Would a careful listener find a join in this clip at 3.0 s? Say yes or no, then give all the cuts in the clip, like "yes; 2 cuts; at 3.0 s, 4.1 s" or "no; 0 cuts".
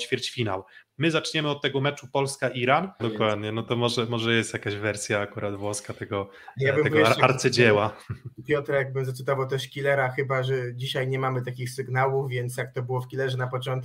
yes; 1 cut; at 3.0 s